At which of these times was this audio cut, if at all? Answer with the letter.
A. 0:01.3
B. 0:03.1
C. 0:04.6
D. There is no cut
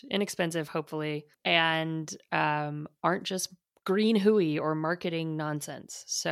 A